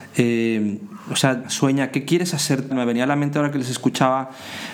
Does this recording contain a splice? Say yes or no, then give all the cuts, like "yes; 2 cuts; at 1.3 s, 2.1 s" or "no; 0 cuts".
yes; 2 cuts; at 1.4 s, 2.7 s